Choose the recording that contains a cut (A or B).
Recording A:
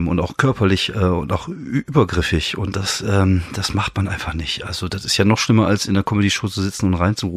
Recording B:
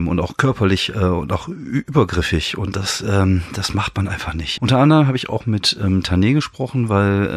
B